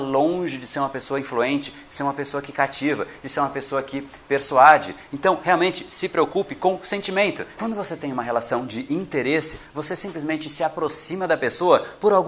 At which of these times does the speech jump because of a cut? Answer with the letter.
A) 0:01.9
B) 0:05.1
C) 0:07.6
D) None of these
C